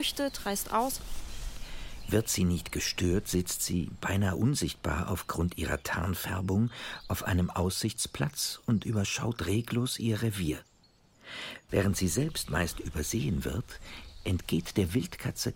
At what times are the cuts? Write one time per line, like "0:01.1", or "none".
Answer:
none